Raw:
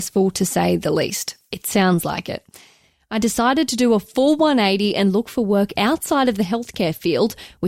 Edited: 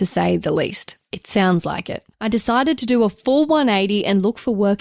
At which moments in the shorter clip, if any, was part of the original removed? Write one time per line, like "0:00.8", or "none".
0:02.1